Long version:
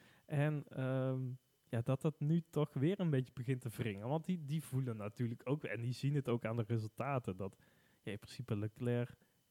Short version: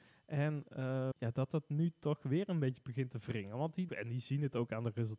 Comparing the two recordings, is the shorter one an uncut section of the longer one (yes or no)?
no